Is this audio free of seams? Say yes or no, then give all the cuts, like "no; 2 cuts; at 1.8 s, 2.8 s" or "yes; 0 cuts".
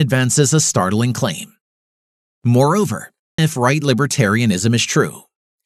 no; 1 cut; at 3.4 s